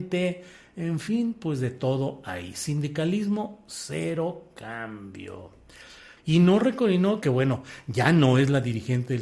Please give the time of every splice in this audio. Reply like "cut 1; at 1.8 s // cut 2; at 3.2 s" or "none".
cut 1; at 6.2 s // cut 2; at 7.2 s

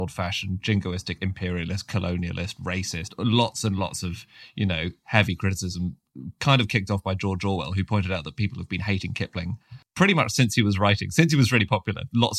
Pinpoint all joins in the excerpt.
none

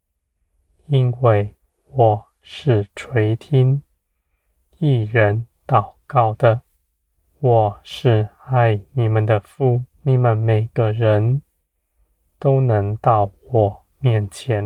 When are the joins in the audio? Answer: cut 1; at 7.2 s // cut 2; at 9.9 s

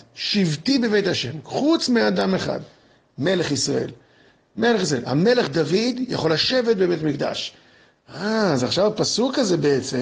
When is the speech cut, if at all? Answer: none

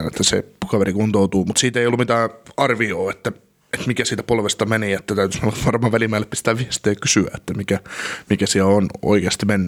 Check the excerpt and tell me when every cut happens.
none

